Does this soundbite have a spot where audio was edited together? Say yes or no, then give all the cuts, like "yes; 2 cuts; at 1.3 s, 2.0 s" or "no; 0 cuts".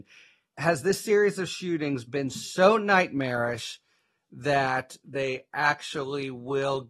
no; 0 cuts